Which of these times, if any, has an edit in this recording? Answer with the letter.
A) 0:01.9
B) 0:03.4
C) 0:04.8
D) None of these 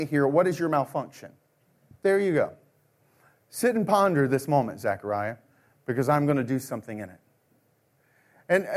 A